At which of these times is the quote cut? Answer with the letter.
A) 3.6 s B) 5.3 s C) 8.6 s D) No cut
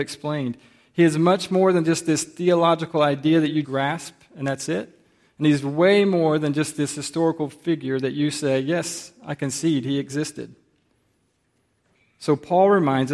A